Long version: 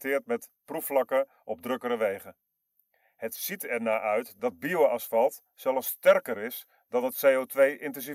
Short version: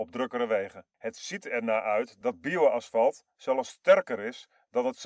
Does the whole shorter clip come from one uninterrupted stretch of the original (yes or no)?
no